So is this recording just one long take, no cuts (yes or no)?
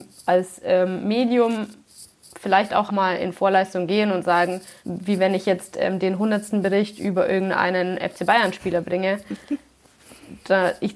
no